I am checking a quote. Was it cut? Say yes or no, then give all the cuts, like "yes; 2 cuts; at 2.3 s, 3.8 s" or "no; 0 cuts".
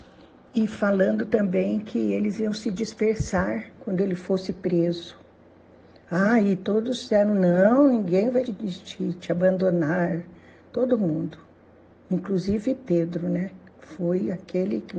yes; 1 cut; at 8.5 s